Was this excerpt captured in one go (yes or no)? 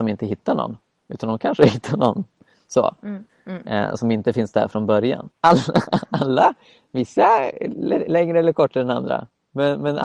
no